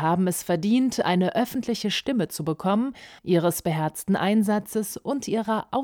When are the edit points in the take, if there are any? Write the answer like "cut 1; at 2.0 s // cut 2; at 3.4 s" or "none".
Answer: cut 1; at 3.2 s